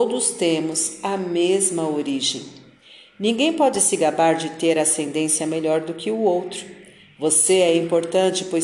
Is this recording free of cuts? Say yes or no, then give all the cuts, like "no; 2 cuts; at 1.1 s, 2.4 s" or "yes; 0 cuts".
yes; 0 cuts